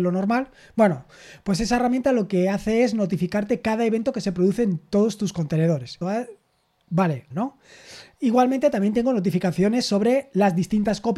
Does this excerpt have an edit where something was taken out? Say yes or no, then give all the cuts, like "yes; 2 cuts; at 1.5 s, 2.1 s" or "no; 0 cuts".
yes; 2 cuts; at 6.0 s, 7.3 s